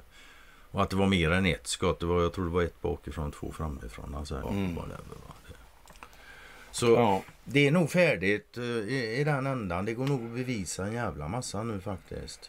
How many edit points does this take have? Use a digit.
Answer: 1